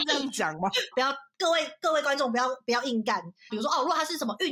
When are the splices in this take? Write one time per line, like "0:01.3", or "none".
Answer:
0:00.9
0:03.5